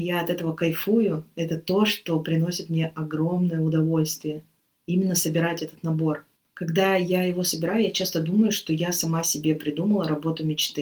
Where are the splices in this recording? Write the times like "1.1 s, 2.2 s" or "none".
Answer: none